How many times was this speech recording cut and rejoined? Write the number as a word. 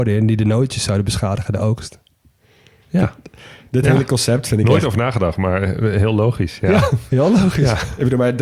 zero